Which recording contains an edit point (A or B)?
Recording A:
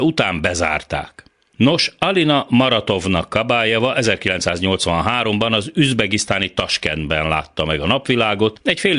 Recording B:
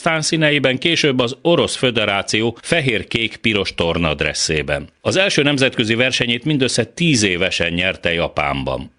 A